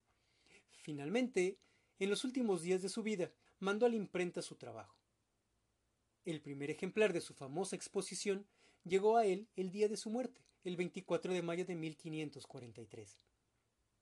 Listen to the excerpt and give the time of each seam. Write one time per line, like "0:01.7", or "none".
0:03.5